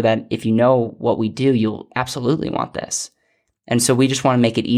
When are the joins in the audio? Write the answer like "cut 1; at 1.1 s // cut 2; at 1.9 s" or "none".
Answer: none